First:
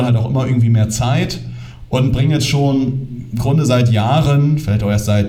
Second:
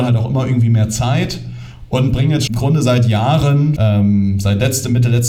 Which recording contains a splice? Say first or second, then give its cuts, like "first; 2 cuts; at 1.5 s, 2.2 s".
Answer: second; 2 cuts; at 2.5 s, 3.8 s